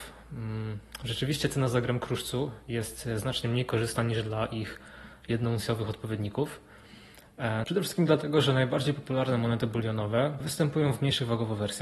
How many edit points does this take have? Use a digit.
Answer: 2